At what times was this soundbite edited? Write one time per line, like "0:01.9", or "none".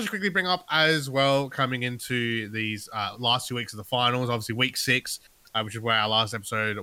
none